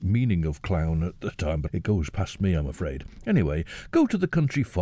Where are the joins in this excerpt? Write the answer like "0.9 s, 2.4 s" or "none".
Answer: 1.7 s